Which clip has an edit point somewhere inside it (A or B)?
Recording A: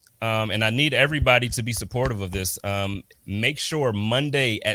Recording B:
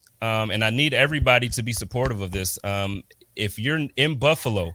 A